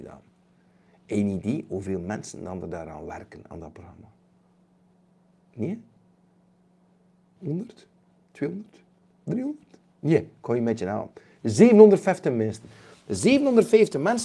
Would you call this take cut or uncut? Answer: uncut